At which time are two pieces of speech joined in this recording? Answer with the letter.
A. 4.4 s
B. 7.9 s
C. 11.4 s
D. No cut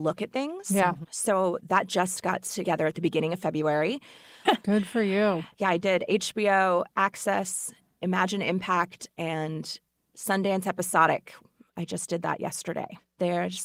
A